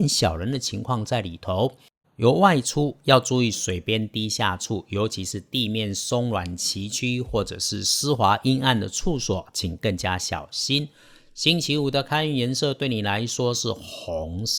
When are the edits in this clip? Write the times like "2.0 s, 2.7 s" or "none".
2.0 s